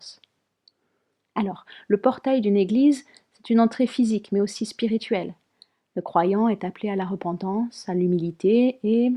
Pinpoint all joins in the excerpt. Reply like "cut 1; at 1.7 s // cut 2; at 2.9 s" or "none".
none